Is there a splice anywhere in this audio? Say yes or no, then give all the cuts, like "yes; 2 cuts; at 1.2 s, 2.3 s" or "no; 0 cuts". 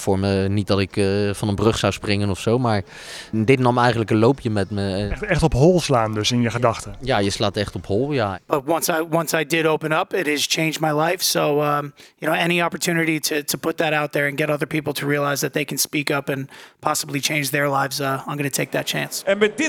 no; 0 cuts